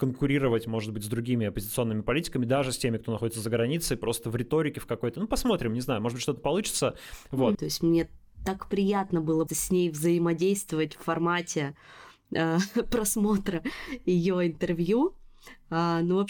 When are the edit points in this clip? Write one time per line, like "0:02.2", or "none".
0:07.5
0:09.5

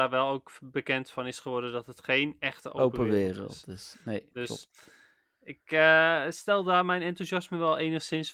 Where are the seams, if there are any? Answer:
none

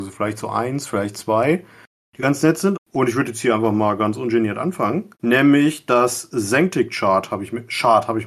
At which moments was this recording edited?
0:02.7
0:05.1

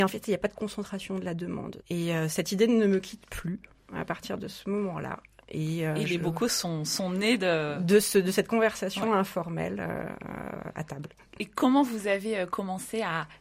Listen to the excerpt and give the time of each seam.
0:01.8

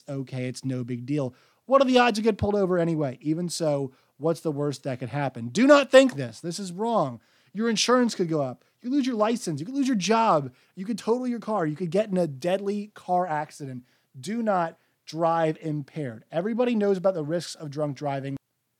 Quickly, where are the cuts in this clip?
0:06.1

